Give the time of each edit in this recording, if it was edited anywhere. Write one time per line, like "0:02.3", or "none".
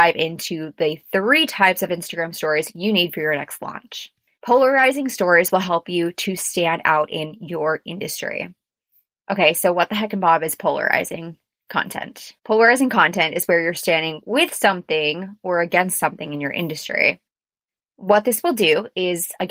0:04.4
0:12.4